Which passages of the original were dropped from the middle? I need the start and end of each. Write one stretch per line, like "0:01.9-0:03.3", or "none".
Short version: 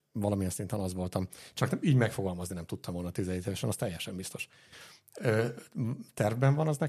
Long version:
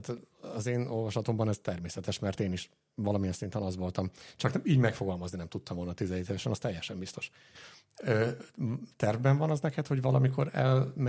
none